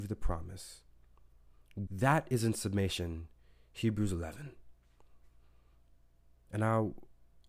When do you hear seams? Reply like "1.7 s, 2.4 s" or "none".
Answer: 1.9 s

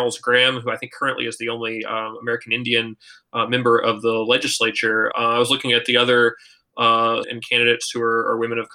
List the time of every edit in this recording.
5.1 s, 7.2 s

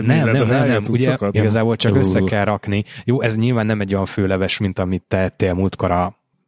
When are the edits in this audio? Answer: 1.3 s

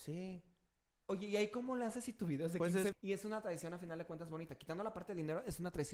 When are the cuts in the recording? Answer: 2.9 s

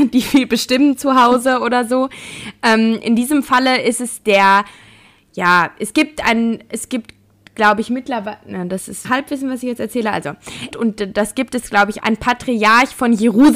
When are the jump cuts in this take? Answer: 9.0 s, 10.7 s, 12.0 s

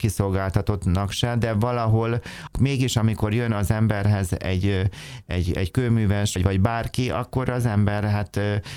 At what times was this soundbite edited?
6.4 s

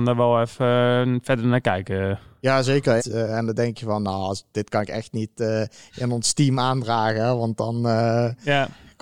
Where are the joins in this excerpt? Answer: 3.0 s

